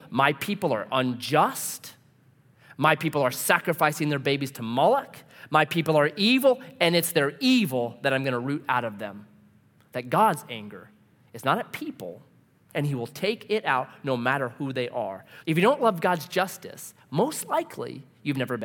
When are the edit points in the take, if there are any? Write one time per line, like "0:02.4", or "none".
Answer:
0:12.7
0:15.4